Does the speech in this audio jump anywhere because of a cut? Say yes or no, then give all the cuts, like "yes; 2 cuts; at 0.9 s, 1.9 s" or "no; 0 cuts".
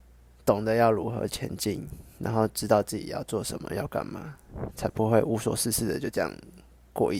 no; 0 cuts